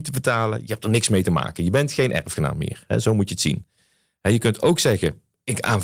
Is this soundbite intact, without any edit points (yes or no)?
yes